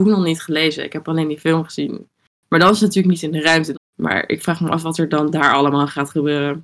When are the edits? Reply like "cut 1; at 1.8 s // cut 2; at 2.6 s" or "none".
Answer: cut 1; at 3.7 s